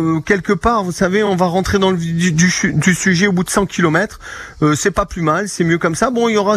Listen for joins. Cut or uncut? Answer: uncut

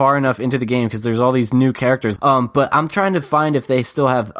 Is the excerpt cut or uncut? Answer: cut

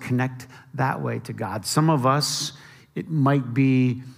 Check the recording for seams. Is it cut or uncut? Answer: uncut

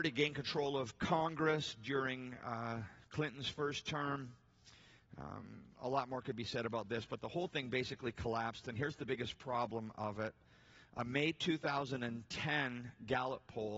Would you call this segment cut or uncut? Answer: uncut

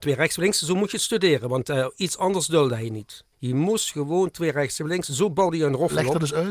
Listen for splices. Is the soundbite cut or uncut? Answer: cut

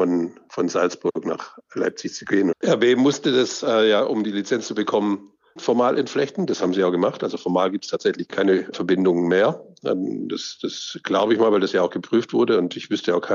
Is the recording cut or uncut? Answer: cut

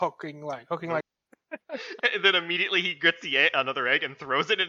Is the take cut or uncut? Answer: cut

